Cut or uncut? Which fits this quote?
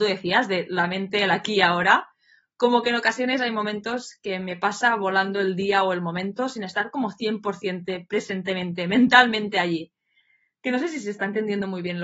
uncut